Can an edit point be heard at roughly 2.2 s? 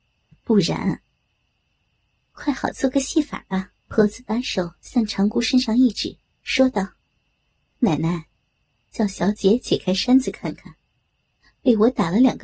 no; 2 cuts; at 3.8 s, 7.0 s

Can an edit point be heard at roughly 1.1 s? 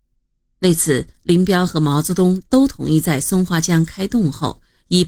no; 0 cuts

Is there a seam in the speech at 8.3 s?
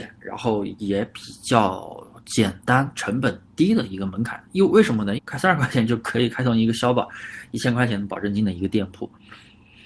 no; 1 cut; at 5.2 s

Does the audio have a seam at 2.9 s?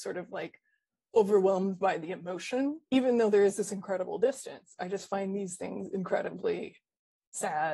yes; 1 cut; at 2.9 s

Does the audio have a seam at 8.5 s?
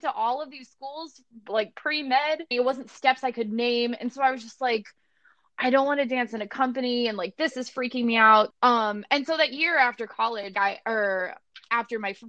yes; 3 cuts; at 2.5 s, 8.5 s, 10.5 s

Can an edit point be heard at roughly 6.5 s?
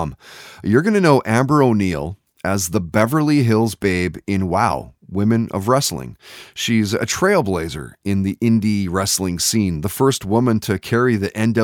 no; 0 cuts

